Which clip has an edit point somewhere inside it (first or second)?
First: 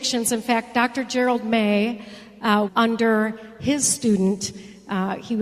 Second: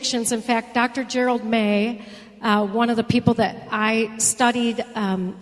first